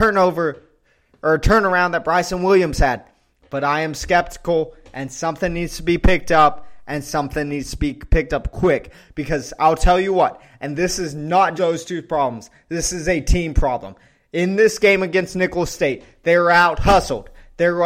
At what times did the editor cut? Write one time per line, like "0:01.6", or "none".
0:11.6